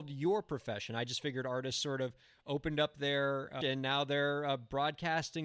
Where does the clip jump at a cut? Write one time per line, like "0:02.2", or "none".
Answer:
0:03.6